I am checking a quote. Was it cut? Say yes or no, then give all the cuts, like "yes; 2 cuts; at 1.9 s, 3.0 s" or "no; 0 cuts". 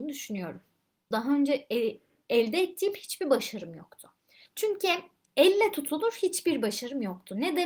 yes; 2 cuts; at 1.1 s, 4.5 s